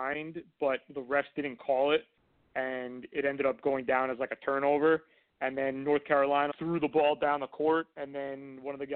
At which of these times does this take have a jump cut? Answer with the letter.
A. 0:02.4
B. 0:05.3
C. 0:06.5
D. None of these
C